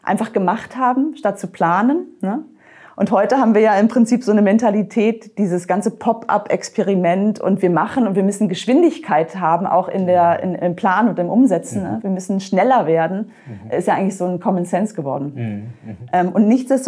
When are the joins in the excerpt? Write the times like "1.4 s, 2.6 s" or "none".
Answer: none